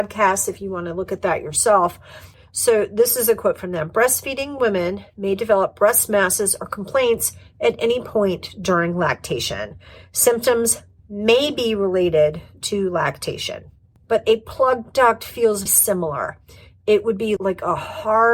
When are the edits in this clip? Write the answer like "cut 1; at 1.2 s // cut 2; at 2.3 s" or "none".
cut 1; at 14.0 s // cut 2; at 15.7 s // cut 3; at 17.4 s